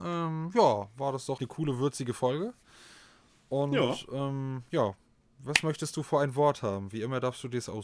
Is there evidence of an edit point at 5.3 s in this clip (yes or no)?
no